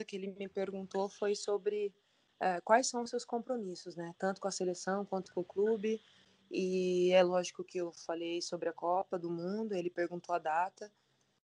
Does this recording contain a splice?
no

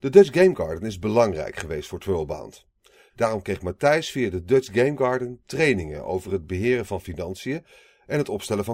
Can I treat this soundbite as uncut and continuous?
no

